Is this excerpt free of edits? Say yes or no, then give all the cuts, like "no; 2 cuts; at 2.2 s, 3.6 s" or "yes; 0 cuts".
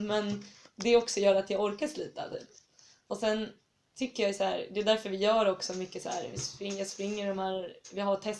yes; 0 cuts